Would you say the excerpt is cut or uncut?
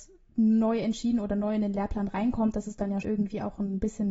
cut